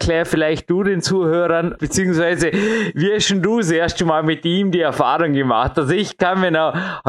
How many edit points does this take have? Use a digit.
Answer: 1